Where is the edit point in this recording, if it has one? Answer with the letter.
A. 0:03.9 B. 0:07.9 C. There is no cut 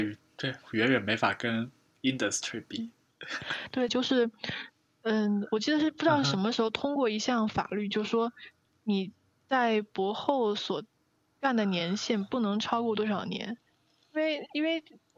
A